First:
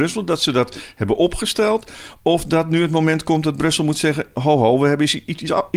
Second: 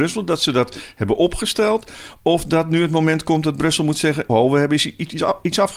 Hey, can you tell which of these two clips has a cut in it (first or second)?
second